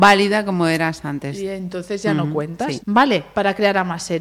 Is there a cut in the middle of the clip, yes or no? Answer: yes